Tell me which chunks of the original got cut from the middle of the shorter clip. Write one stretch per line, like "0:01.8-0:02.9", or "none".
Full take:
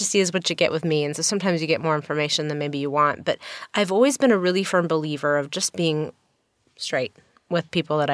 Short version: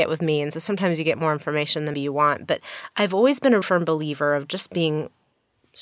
0:02.6-0:02.7
0:04.4-0:04.6